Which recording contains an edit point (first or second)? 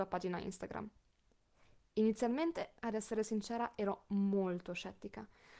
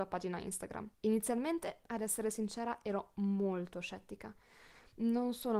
second